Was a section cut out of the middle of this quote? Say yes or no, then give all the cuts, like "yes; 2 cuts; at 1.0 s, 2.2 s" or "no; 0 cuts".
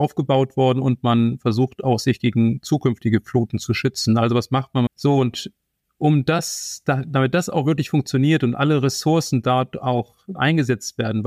yes; 2 cuts; at 4.9 s, 10.4 s